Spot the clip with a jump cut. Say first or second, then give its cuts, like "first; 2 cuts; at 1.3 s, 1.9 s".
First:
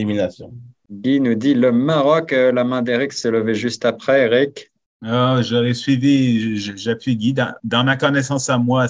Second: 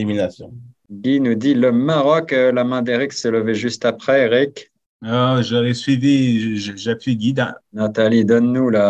second; 1 cut; at 7.6 s